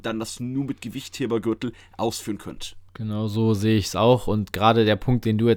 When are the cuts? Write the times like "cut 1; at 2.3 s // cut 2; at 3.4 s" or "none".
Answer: cut 1; at 2.9 s